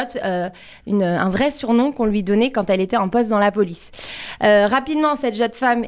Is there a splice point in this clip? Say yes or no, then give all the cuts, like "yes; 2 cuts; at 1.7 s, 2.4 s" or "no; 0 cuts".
no; 0 cuts